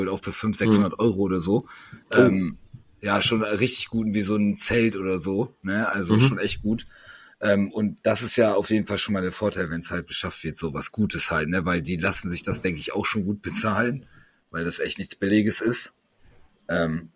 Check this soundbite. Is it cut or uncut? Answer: uncut